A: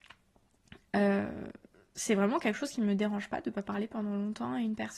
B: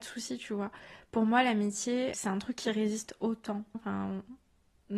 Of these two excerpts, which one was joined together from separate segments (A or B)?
B